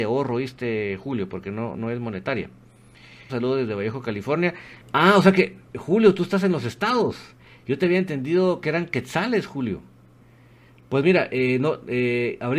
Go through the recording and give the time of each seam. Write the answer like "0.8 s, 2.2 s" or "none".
3.3 s, 4.8 s